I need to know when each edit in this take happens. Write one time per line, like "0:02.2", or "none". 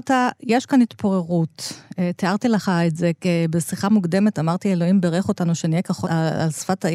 0:06.1